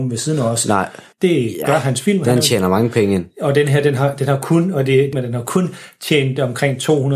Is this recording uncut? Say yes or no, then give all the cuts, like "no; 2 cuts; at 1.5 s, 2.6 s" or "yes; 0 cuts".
no; 2 cuts; at 1.1 s, 5.1 s